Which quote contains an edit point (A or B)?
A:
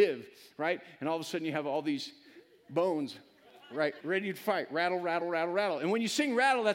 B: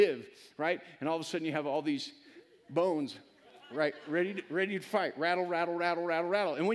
A